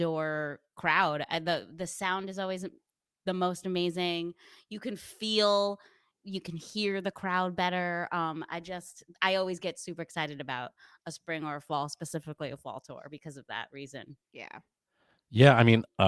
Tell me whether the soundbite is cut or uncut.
uncut